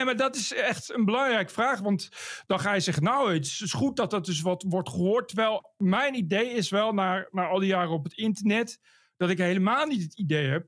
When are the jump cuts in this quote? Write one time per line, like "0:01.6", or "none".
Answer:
none